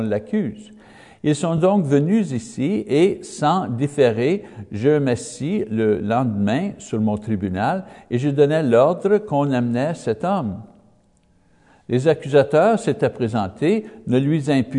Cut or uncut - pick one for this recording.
uncut